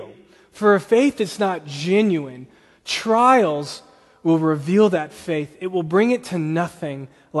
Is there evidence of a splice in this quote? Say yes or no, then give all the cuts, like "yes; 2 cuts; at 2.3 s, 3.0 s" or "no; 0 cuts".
no; 0 cuts